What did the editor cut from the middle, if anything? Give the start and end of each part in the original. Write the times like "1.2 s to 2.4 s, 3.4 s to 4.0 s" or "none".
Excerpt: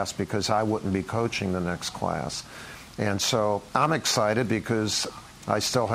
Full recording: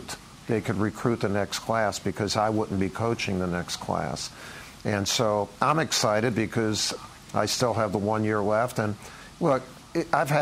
none